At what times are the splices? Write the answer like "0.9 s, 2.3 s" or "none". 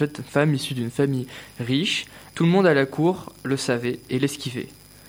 2.3 s